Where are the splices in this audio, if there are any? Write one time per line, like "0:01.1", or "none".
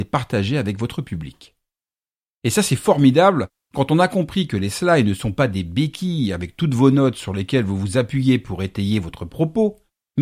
none